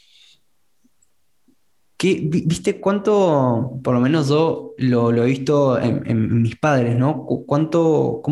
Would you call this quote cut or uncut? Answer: uncut